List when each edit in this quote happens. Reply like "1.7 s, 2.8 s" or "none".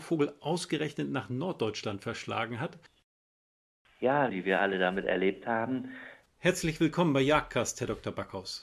4.3 s, 6.2 s